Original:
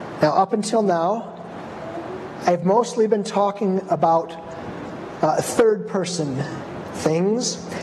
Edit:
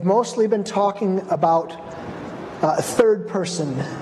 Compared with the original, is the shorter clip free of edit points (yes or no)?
yes